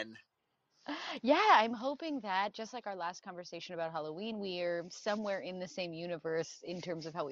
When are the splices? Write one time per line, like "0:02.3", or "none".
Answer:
none